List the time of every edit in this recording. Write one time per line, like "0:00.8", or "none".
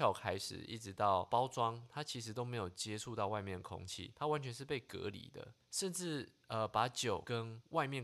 0:05.6